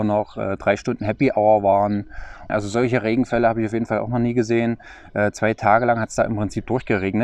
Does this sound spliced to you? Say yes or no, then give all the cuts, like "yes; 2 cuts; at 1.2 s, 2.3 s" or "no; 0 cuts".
yes; 1 cut; at 2.5 s